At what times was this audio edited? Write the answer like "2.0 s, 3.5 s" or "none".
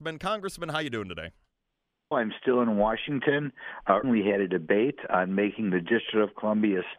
2.1 s, 4.0 s